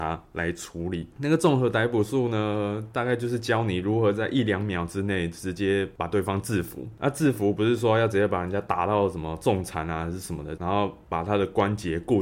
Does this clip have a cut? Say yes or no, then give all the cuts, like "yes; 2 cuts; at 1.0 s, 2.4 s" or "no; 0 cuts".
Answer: yes; 2 cuts; at 1.1 s, 10.6 s